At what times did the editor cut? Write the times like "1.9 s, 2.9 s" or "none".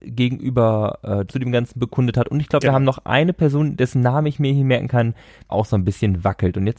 1.3 s, 5.5 s